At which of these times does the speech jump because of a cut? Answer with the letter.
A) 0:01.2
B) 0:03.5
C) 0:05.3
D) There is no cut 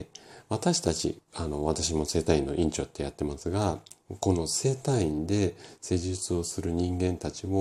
D